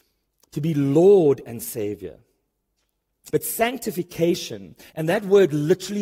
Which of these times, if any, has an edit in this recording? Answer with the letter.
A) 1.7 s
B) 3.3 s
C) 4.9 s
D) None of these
B